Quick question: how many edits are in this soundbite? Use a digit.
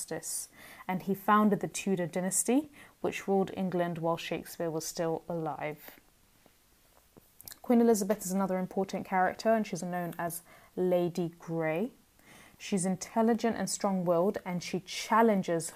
1